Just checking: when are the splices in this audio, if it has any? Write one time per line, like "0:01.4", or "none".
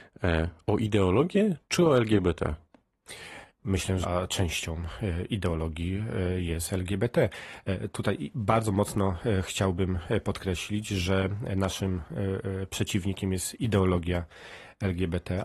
0:04.0